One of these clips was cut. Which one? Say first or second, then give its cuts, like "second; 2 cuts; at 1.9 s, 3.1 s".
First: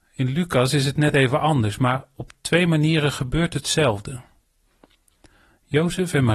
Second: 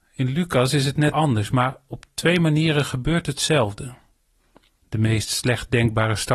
second; 2 cuts; at 1.1 s, 4.8 s